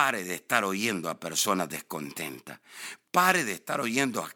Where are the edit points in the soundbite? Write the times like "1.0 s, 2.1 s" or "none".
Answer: 3.0 s